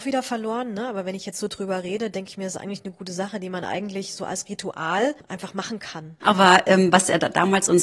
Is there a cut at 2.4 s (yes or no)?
no